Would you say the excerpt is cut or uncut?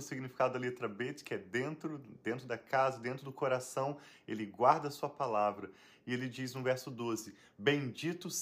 uncut